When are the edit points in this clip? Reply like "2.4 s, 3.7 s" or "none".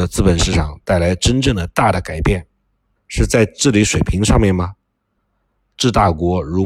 3.0 s